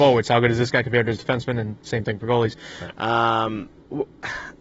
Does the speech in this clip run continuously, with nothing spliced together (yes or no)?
no